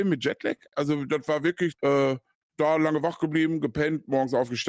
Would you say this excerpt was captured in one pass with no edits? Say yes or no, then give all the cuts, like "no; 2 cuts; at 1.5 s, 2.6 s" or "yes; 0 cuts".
no; 1 cut; at 1.7 s